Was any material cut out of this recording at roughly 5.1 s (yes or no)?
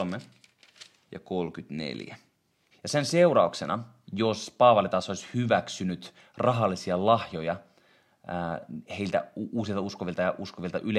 no